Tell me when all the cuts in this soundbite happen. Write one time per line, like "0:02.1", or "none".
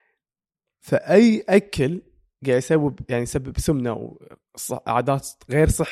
none